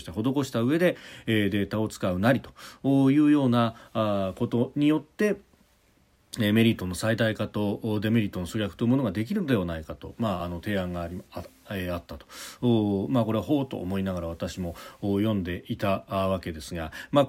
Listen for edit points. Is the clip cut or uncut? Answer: uncut